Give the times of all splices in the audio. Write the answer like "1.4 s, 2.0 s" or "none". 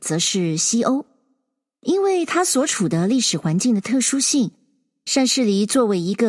none